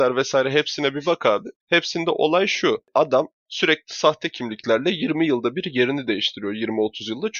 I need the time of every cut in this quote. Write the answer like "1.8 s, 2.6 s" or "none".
none